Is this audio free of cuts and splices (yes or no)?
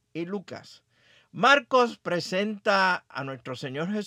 yes